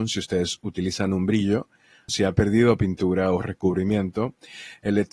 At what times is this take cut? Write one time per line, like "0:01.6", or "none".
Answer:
0:02.1